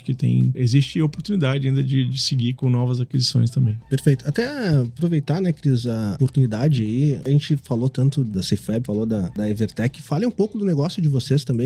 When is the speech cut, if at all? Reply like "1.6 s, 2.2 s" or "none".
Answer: none